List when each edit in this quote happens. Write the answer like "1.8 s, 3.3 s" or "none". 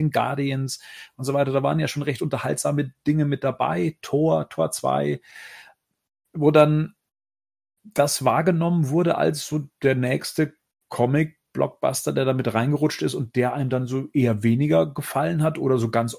none